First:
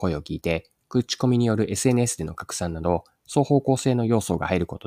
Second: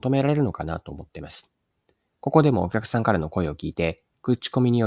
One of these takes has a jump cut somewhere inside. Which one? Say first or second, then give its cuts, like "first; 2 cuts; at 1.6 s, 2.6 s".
second; 1 cut; at 2.1 s